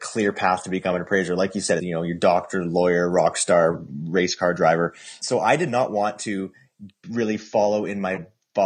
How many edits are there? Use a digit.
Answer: 1